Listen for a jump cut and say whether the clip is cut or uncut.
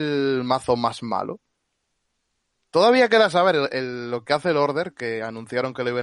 uncut